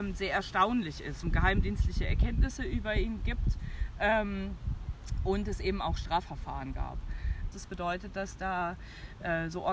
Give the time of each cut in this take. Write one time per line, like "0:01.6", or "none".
0:01.2
0:07.5